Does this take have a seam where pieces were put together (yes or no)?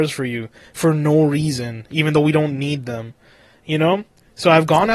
no